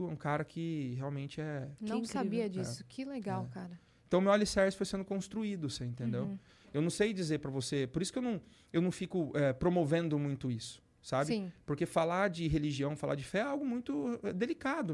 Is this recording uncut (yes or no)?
yes